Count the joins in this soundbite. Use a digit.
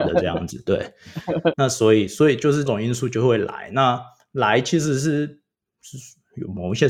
2